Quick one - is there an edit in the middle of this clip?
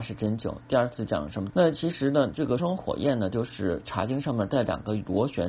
yes; 2 cuts; at 1.5 s, 2.6 s

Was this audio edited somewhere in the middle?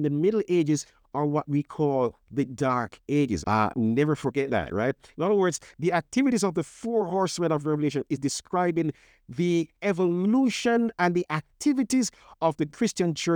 yes; 1 cut; at 3.4 s

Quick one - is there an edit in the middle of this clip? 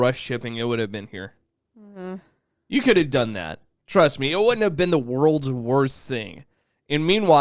no; 0 cuts

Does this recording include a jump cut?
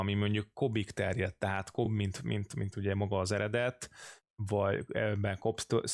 no; 0 cuts

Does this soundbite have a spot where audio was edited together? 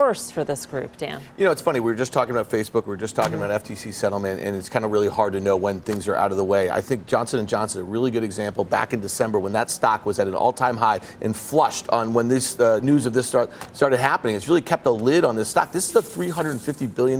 no; 0 cuts

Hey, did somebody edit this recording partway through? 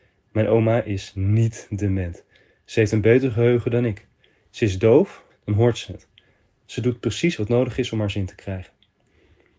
yes; 1 cut; at 5.3 s

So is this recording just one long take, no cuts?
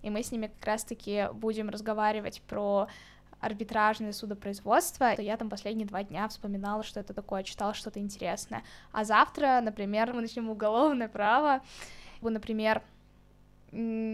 no; 3 cuts; at 5.2 s, 10.1 s, 12.2 s

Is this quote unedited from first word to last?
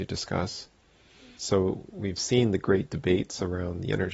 no; 1 cut; at 1.4 s

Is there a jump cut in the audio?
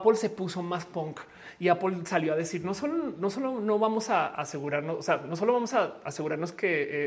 no; 0 cuts

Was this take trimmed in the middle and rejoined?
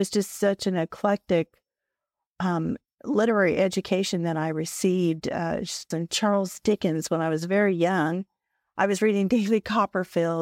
yes; 1 cut; at 5.9 s

